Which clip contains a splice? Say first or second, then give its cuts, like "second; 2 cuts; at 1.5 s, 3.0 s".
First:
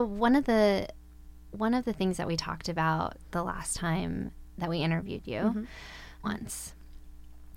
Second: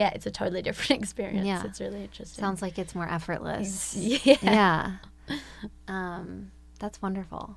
first; 1 cut; at 6.2 s